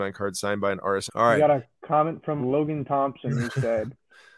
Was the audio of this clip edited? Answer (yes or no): yes